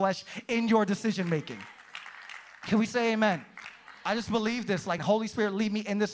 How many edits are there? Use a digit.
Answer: 1